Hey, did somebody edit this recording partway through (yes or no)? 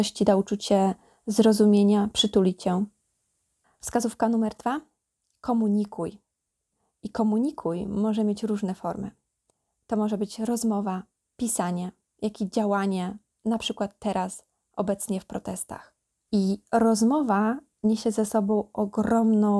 yes